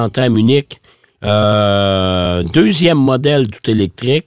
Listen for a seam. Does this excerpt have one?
no; 0 cuts

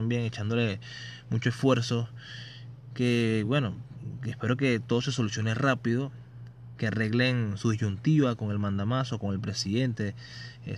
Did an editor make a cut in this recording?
no; 0 cuts

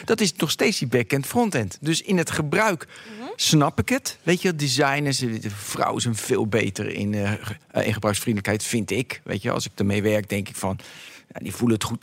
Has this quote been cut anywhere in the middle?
no; 0 cuts

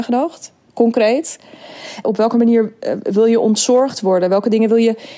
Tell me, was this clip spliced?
yes; 1 cut; at 2.0 s

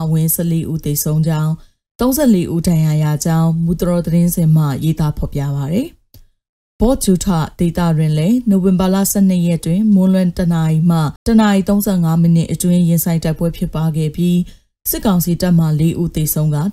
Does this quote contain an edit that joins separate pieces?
yes; 1 cut; at 11.2 s

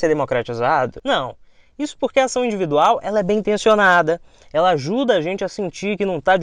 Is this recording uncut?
yes; 0 cuts

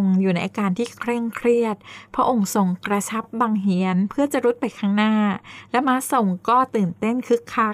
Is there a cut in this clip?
no; 0 cuts

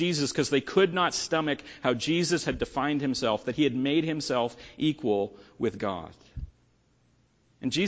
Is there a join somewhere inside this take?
no; 0 cuts

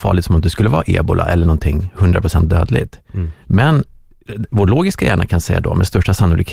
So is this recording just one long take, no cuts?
yes; 0 cuts

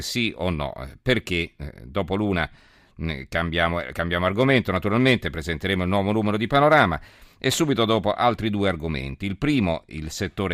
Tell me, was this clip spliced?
no; 0 cuts

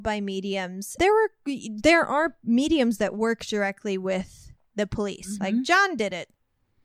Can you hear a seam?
yes; 2 cuts; at 1.0 s, 5.4 s

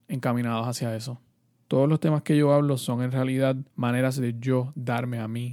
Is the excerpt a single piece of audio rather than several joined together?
no; 2 cuts; at 1.6 s, 3.7 s

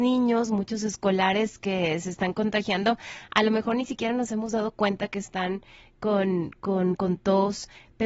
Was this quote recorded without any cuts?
no; 1 cut; at 7.0 s

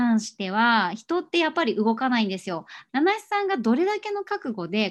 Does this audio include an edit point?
yes; 1 cut; at 2.9 s

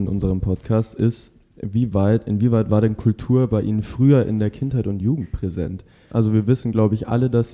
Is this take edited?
yes; 1 cut; at 6.1 s

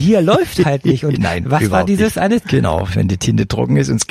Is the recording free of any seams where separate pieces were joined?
no; 1 cut; at 2.4 s

